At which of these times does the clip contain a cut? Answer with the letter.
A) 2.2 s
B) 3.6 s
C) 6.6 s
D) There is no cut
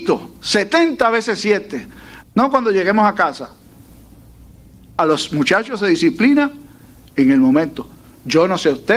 A